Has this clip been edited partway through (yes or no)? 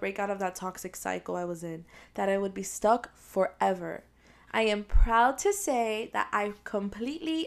no